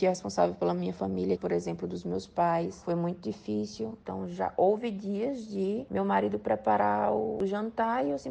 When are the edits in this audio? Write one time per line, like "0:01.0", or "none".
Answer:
0:01.4
0:04.0

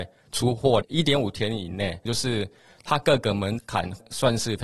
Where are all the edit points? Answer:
0:02.1

